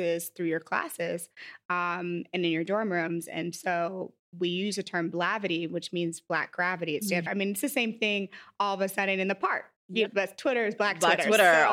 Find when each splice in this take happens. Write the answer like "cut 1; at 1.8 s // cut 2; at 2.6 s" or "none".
cut 1; at 7.3 s // cut 2; at 10.1 s

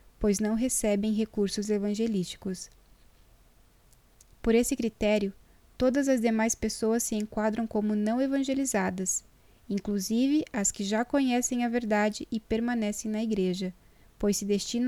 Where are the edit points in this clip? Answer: none

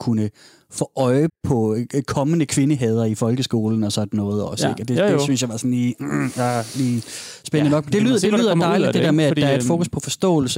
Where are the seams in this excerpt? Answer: cut 1; at 1.3 s

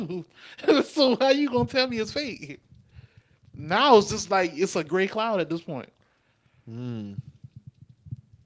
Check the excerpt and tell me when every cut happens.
none

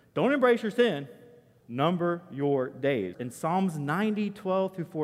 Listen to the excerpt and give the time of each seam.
cut 1; at 1.6 s // cut 2; at 3.1 s

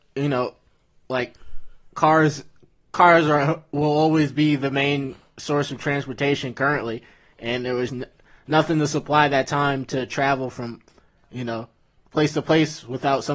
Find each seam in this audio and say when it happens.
cut 1; at 7.9 s // cut 2; at 12.0 s

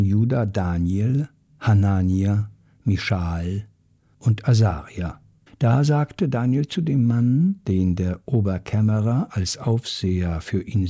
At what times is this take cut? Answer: cut 1; at 5.5 s

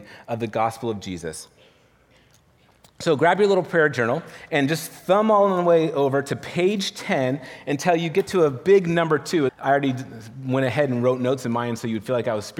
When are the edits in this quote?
cut 1; at 9.5 s

